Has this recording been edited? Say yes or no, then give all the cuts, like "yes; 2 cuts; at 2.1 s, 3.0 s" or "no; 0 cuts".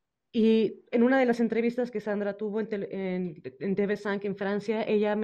no; 0 cuts